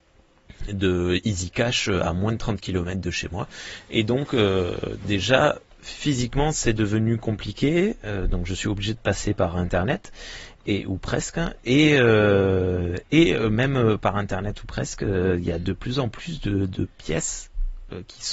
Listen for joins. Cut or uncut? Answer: uncut